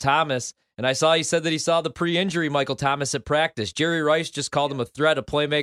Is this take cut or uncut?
uncut